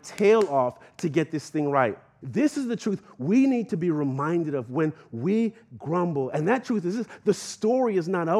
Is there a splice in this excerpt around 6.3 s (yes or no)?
no